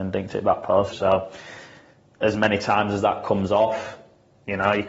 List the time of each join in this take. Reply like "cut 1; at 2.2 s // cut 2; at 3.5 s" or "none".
cut 1; at 0.9 s